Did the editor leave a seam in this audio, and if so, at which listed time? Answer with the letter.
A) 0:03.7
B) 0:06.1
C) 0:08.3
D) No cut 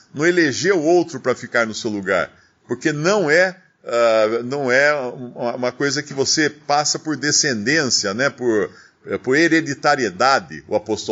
D